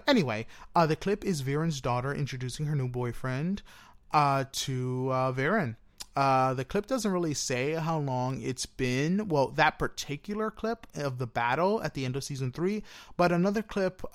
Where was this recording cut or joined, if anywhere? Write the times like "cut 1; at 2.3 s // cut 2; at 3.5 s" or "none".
none